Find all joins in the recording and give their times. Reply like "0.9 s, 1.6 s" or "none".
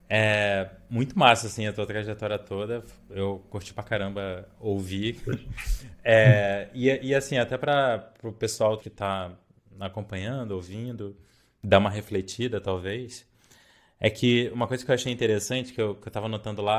8.8 s

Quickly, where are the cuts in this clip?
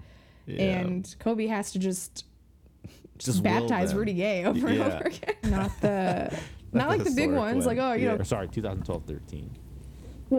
5.4 s, 8.2 s

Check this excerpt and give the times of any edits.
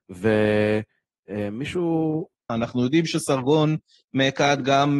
2.5 s

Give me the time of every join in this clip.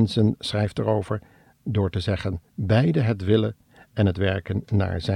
2.5 s

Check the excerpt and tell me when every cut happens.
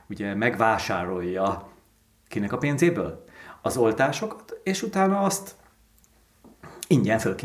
none

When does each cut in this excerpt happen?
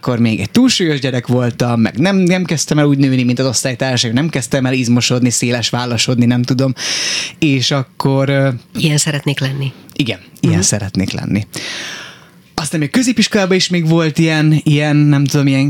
8.8 s

